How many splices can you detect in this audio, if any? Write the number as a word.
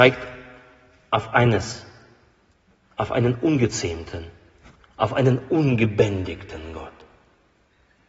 zero